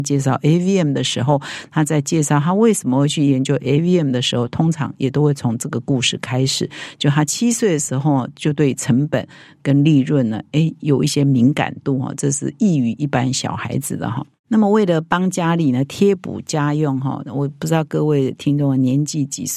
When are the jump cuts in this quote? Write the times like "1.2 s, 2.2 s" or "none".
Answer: none